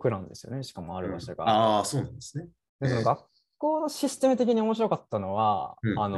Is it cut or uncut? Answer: uncut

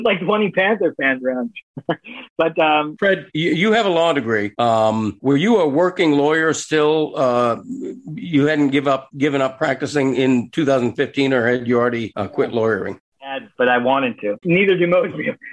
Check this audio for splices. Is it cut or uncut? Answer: cut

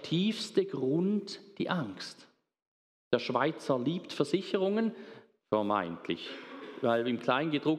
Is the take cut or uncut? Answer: cut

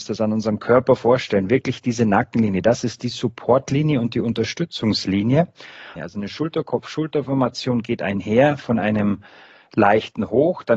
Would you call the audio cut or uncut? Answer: cut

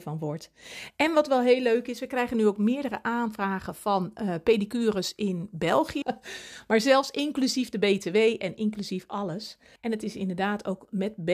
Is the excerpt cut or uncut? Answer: cut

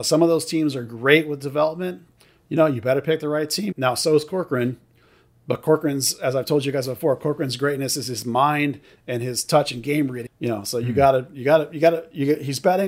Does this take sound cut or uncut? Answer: cut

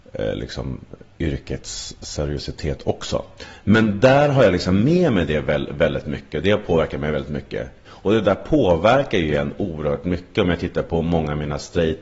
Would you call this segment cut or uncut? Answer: cut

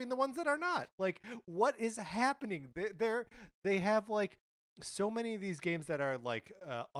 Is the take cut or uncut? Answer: cut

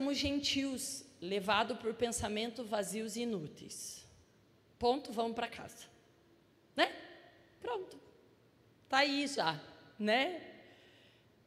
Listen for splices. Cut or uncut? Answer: uncut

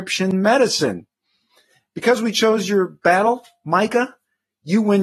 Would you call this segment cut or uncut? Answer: uncut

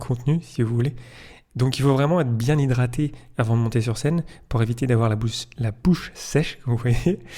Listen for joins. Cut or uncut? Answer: uncut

